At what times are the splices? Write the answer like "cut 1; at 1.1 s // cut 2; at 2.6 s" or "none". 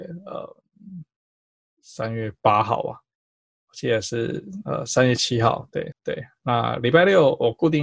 cut 1; at 5.9 s